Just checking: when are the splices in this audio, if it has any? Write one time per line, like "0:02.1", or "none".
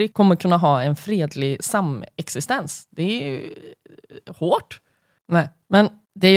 0:05.2